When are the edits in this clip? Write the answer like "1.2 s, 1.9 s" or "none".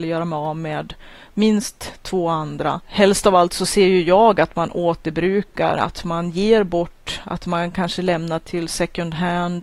none

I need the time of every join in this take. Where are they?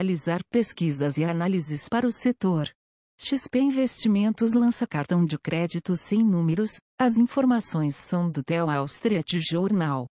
3.0 s, 6.9 s

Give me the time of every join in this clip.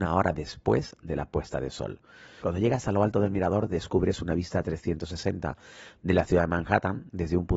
2.4 s

